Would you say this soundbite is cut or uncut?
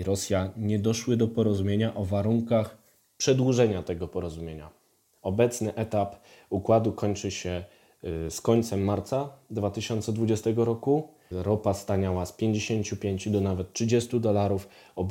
cut